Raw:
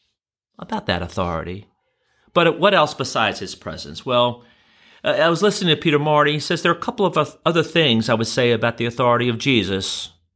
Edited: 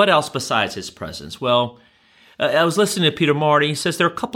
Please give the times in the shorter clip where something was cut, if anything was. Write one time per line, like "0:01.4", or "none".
none